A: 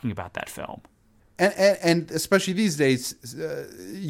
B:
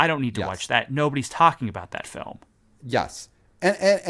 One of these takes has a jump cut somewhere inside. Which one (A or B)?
A